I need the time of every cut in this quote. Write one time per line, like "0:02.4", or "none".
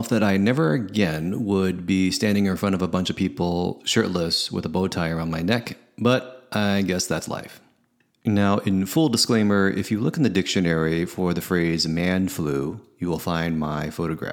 0:08.1